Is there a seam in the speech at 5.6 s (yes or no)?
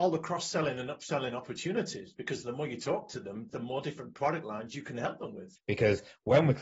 yes